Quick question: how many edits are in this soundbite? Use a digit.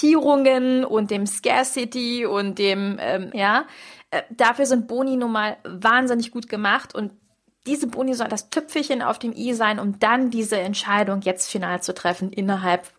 2